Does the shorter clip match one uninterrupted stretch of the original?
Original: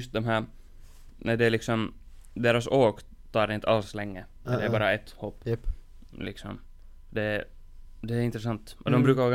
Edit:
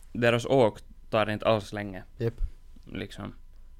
no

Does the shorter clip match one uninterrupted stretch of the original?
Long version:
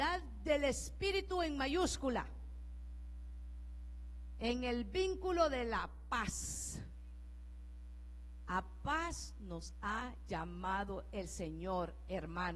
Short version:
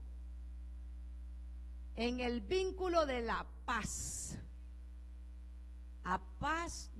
yes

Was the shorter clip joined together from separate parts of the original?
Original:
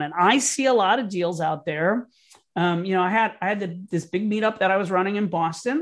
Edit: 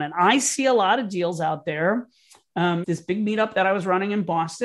yes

